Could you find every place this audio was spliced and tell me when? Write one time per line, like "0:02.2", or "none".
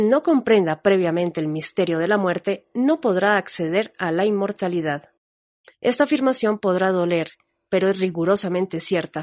0:05.7